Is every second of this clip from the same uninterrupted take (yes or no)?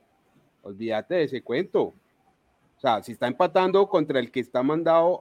yes